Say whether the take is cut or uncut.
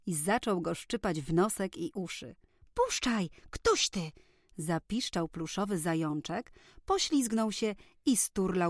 uncut